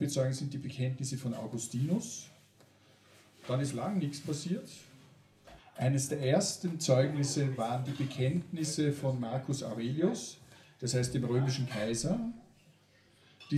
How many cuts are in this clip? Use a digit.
1